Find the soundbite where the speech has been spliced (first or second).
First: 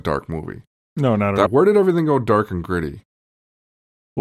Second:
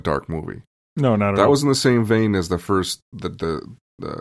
first